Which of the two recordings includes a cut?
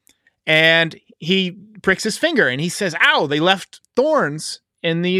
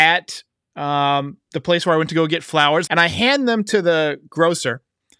second; 1 cut; at 2.9 s

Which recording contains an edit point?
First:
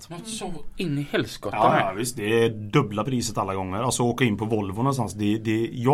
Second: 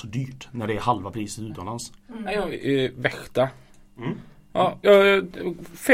second; 2 cuts; at 2.5 s, 4.8 s

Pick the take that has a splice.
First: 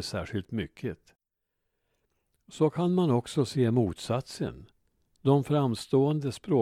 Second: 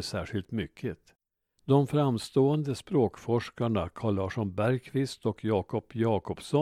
second; 1 cut; at 1.6 s

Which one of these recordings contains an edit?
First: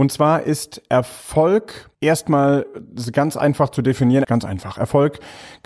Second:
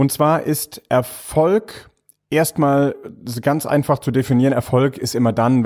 first; 2 cuts; at 1.9 s, 4.2 s

